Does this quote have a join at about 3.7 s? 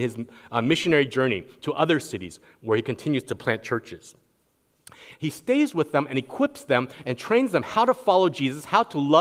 no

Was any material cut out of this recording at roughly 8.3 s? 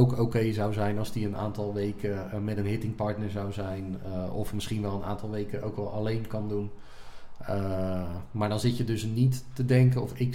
no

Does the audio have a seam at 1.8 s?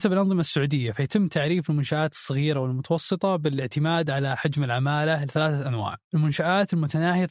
no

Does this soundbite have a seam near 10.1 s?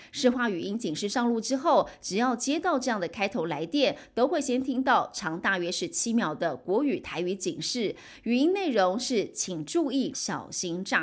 yes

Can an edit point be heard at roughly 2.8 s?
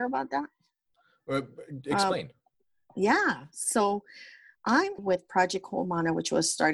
no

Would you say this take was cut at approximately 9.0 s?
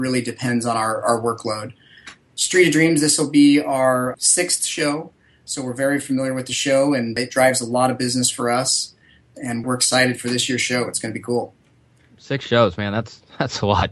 no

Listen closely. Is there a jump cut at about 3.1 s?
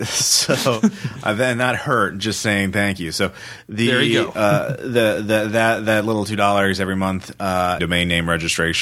no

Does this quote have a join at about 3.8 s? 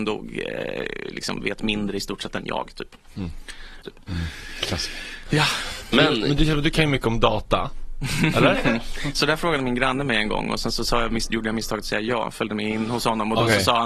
yes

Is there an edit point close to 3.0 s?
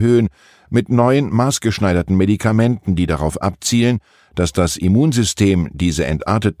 no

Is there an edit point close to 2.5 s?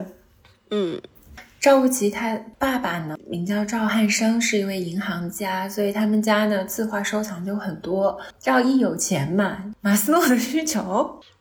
no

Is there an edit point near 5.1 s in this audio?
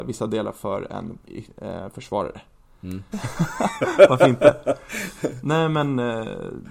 no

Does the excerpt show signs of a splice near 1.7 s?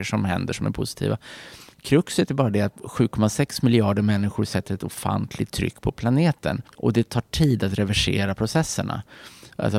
no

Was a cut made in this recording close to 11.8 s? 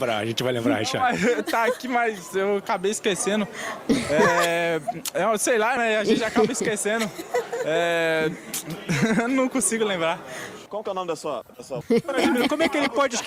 yes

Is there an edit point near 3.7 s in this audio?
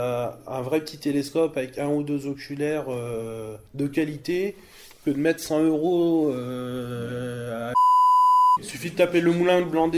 yes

